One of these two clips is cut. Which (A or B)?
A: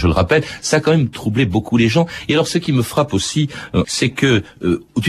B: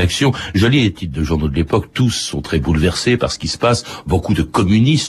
A